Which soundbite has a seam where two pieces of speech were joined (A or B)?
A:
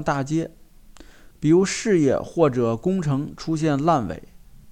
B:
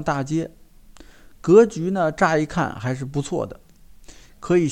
A